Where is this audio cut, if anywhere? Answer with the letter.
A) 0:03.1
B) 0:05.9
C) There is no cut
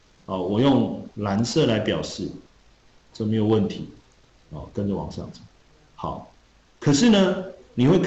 A